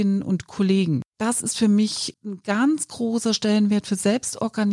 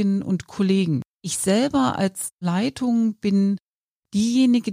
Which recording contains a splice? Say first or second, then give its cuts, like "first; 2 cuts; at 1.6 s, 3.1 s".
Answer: first; 2 cuts; at 1.1 s, 2.1 s